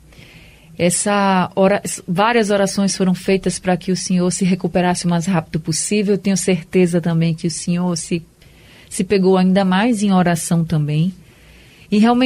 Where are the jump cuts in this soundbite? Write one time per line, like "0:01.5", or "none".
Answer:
none